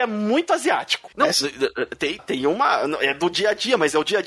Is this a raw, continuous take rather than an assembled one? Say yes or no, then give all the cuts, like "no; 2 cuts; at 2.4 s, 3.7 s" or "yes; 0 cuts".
no; 2 cuts; at 1.1 s, 2.2 s